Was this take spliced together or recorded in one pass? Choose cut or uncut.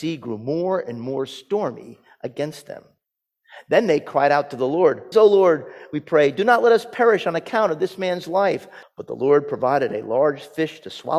cut